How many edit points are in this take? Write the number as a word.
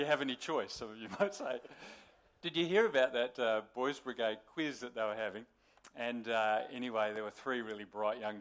zero